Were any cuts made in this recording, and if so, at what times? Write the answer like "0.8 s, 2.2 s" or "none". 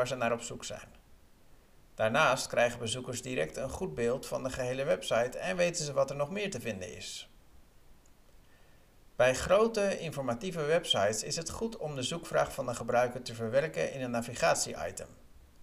none

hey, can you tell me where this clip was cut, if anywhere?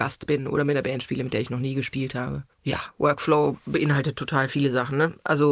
2.5 s

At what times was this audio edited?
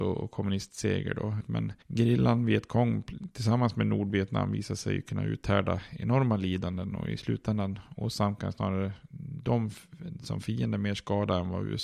1.4 s

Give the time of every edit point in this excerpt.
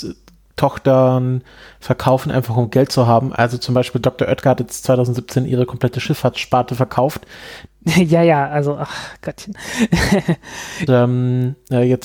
7.7 s, 10.9 s

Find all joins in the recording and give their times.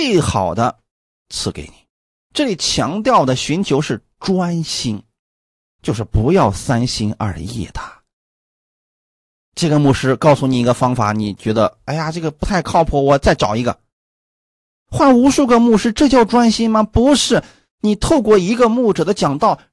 2.2 s

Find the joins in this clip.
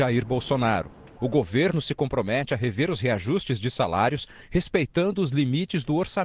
1.2 s

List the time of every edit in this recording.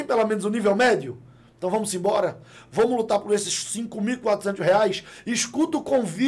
none

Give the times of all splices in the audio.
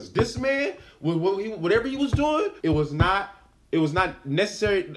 2.6 s

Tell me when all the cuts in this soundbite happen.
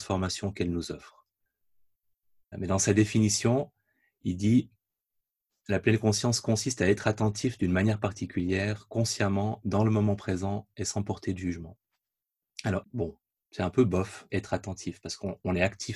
2.5 s, 12.8 s, 14.3 s

